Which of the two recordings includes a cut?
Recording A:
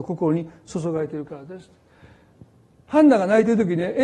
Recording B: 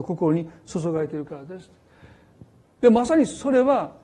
B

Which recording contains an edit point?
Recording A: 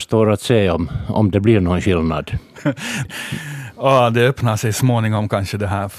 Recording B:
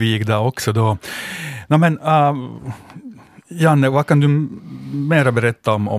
A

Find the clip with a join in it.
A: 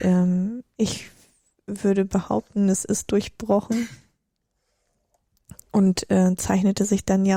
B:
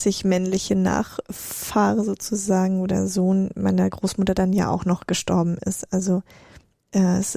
A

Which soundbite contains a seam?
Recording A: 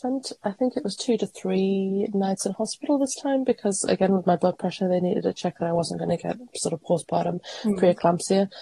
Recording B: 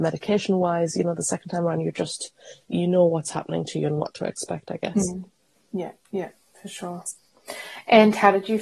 B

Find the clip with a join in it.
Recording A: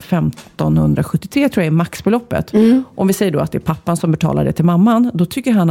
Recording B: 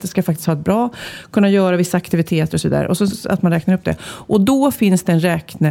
B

